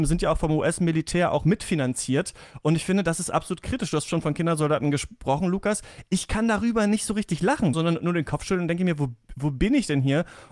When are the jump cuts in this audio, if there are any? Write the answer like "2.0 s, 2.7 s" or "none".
7.7 s